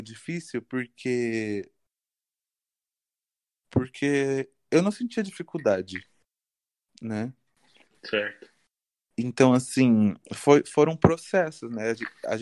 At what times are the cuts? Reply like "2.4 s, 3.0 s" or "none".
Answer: none